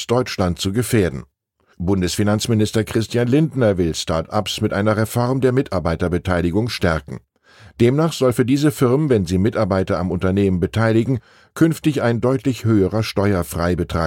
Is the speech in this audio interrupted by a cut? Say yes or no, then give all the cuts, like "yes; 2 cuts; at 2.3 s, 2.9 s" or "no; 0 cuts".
yes; 1 cut; at 1.7 s